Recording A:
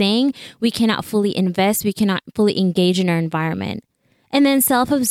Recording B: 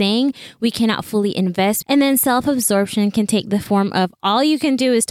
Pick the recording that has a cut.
B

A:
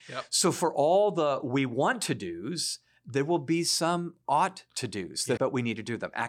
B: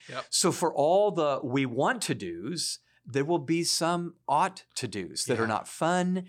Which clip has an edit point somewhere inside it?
A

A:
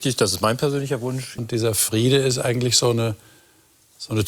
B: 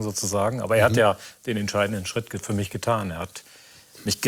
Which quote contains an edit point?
A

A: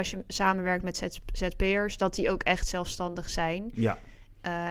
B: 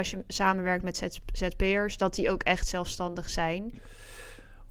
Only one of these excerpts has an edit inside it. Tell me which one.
B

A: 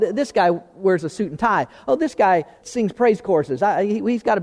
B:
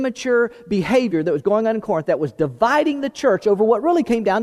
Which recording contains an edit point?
A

